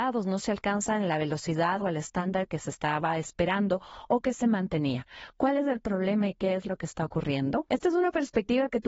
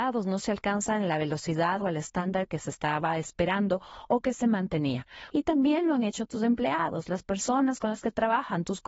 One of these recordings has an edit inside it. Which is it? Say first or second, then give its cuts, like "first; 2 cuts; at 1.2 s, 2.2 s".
second; 1 cut; at 5.3 s